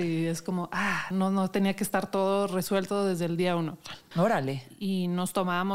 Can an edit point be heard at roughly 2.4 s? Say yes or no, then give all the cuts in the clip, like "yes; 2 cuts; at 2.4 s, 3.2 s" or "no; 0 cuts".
no; 2 cuts; at 1.1 s, 4.1 s